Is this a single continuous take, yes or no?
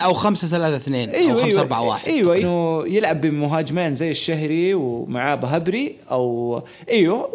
no